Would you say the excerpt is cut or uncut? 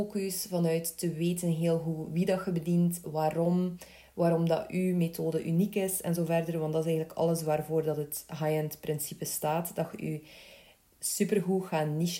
uncut